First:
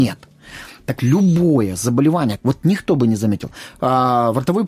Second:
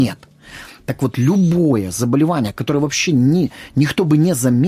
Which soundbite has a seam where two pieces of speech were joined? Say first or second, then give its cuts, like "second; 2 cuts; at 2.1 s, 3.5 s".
first; 2 cuts; at 1.0 s, 2.4 s